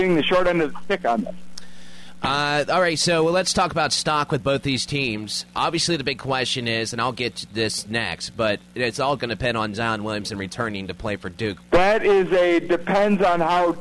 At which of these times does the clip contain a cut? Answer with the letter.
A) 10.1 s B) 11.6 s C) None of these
B